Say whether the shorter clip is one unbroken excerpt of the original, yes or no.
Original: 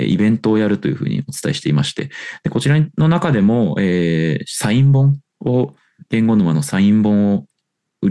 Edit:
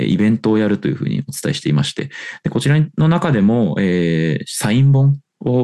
yes